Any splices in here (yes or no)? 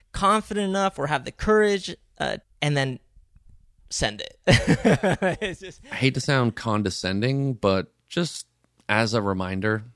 yes